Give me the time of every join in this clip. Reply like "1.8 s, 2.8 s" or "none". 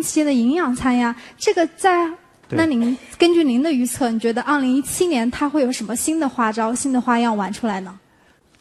2.4 s